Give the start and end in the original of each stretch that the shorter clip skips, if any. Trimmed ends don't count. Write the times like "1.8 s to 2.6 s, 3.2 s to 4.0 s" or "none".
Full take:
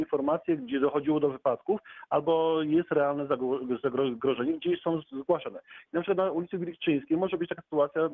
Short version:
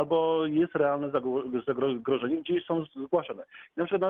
none